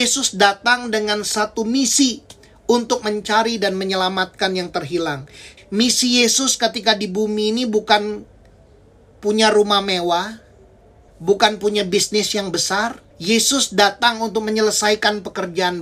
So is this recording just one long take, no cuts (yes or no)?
no